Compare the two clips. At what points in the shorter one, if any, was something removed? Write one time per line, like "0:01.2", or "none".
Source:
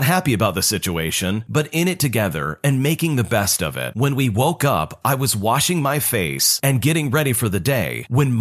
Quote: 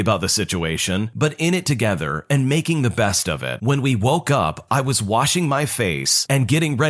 none